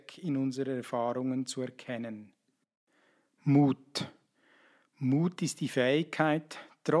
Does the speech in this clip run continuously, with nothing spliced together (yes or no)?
yes